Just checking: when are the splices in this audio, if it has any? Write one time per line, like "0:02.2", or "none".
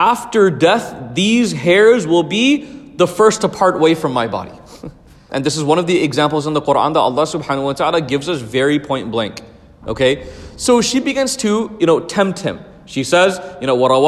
0:05.3